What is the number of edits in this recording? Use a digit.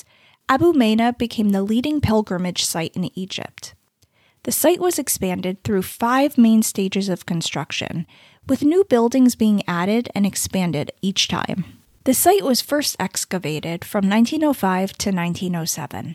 1